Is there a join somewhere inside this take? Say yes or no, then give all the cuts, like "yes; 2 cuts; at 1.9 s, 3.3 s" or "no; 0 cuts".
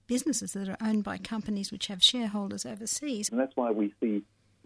yes; 1 cut; at 3.3 s